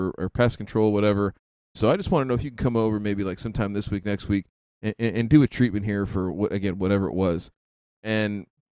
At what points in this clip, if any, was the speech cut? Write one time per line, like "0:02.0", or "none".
0:01.8